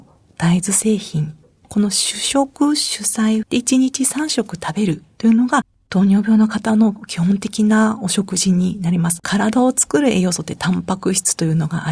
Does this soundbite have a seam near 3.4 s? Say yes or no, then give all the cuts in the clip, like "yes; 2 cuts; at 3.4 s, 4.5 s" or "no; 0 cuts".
yes; 2 cuts; at 3.4 s, 9.2 s